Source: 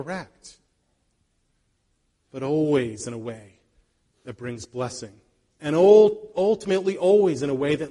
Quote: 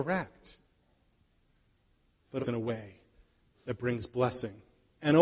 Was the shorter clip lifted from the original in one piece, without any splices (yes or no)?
no